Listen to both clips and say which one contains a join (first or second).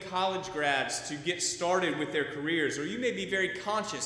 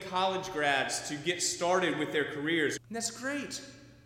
second